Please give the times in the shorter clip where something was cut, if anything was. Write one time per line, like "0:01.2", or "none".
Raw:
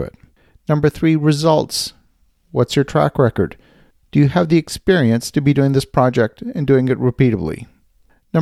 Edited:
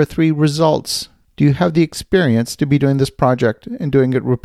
0:01.2